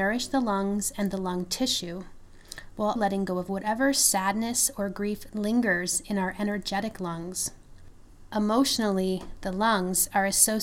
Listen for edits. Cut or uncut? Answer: cut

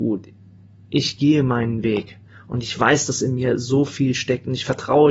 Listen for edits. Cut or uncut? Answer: uncut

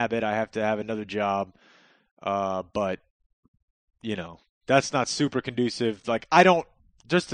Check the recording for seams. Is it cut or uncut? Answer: uncut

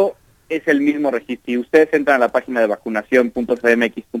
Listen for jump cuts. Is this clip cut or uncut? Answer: cut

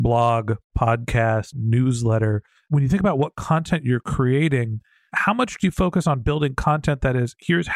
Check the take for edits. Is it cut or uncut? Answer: cut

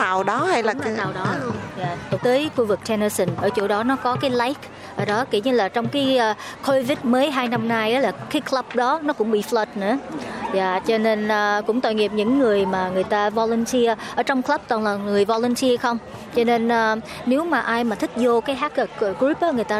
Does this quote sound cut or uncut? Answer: cut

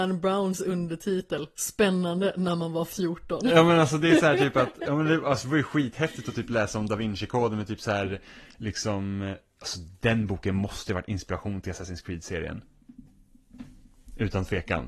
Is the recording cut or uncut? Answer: uncut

